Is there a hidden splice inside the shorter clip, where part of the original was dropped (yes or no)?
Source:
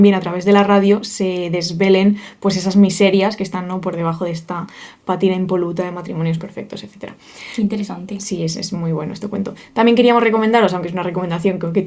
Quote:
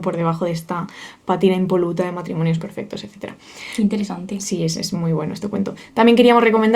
no